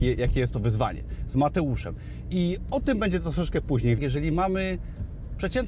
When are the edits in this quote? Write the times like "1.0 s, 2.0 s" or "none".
4.0 s